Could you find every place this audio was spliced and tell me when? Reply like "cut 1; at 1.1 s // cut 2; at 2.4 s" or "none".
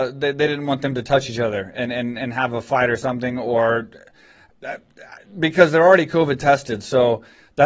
none